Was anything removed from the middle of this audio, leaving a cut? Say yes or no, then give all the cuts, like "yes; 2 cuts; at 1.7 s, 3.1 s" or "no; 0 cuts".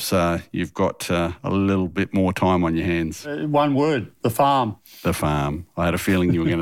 no; 0 cuts